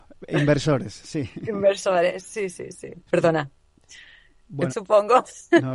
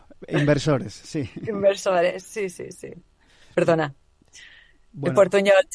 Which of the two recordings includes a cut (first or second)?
first